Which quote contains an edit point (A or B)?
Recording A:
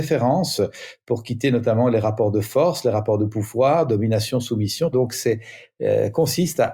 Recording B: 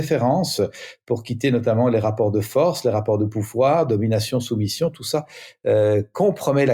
A